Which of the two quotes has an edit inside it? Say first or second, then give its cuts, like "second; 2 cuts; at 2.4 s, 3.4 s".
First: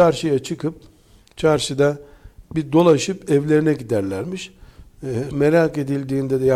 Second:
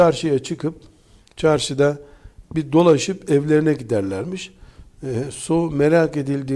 first; 1 cut; at 5.3 s